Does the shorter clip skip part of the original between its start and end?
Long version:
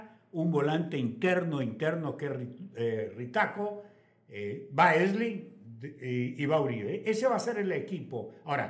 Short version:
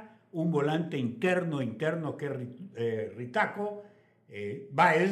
no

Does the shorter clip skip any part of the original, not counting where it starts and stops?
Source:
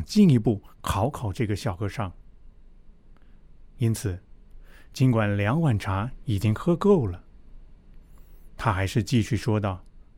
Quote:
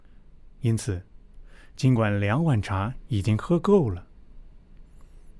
no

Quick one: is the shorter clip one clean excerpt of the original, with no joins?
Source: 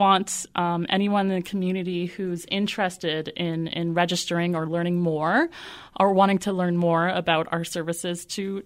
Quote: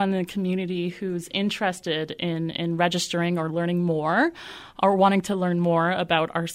yes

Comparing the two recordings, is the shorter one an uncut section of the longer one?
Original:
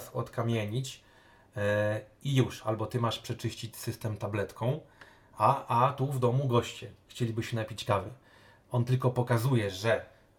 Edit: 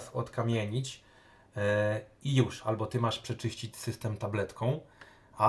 yes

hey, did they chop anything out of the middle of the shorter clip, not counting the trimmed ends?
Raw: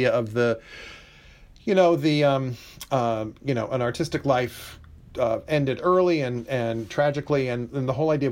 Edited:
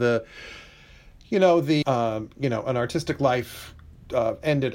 yes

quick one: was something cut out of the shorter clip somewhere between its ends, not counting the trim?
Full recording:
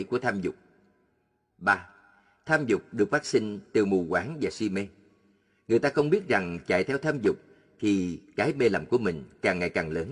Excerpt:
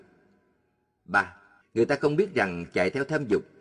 yes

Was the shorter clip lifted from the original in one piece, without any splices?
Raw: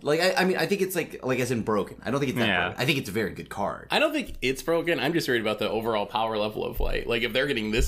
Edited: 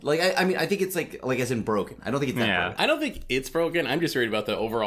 no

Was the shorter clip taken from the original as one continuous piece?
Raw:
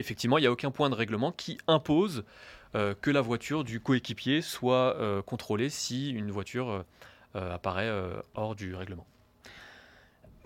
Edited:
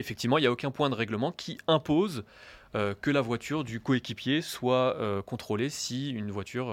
yes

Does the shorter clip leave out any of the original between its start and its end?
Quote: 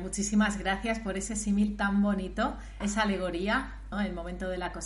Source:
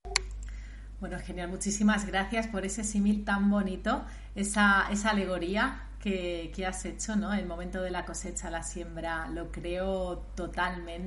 yes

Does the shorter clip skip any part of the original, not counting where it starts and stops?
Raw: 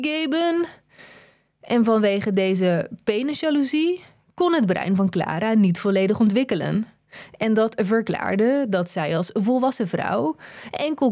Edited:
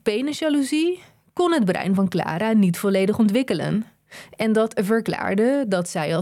no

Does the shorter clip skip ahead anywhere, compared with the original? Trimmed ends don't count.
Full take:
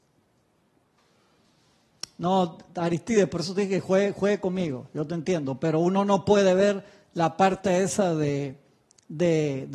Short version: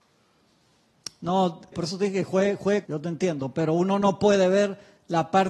yes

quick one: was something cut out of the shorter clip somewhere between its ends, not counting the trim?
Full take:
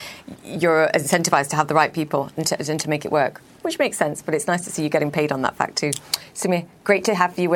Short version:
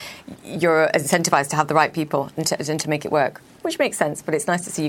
no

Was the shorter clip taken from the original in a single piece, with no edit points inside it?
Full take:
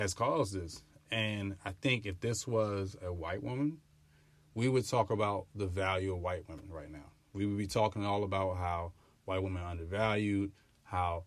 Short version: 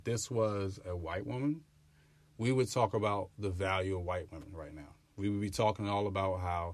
yes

